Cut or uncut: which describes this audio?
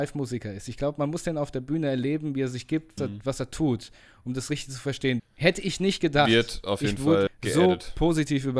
cut